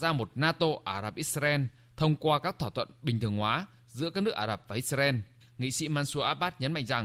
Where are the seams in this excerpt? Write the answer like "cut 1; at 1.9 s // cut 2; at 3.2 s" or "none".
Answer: cut 1; at 5.4 s